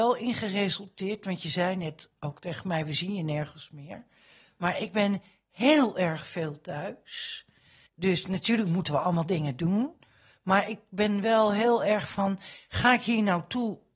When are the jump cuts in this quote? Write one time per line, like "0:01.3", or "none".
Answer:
0:07.9